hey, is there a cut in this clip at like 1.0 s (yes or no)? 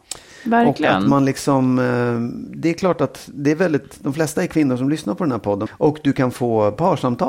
no